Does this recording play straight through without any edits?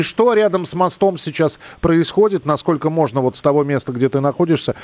yes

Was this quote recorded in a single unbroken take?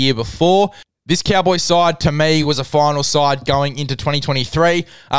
yes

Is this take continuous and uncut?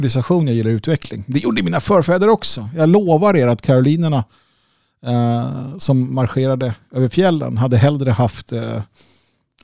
yes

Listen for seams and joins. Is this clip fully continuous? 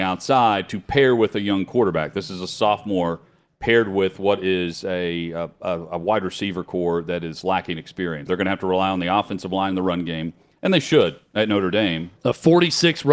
no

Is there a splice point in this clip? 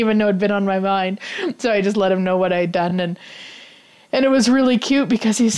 no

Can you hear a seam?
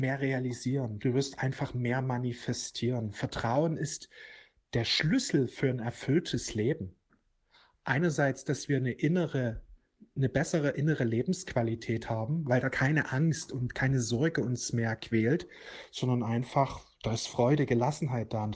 yes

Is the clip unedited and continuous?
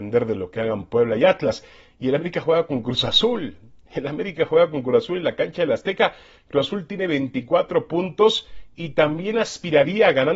yes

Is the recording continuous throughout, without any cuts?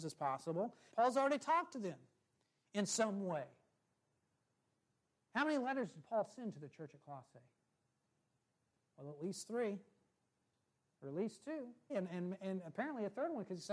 no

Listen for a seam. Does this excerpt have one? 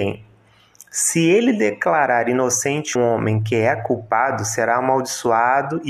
yes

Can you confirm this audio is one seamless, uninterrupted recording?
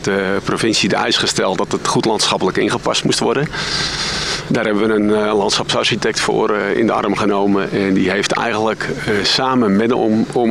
yes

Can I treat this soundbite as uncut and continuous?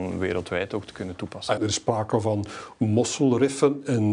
no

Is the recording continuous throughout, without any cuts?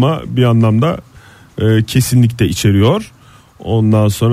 yes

